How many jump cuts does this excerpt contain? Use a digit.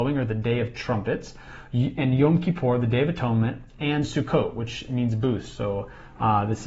0